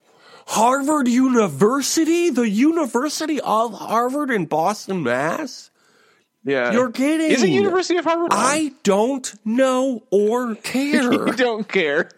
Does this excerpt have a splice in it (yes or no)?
yes